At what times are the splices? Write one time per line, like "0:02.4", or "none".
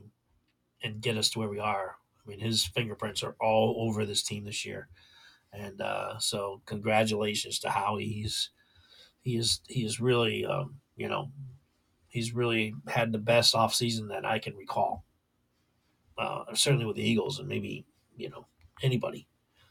none